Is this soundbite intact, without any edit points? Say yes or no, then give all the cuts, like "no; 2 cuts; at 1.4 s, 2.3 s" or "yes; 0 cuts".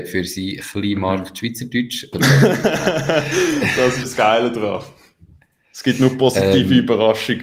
no; 2 cuts; at 2.1 s, 4.0 s